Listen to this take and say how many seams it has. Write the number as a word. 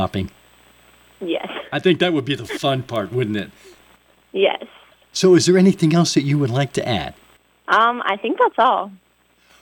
zero